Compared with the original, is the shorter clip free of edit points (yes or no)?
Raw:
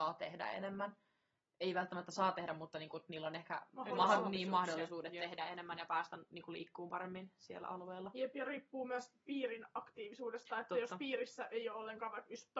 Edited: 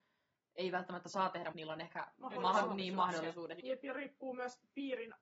no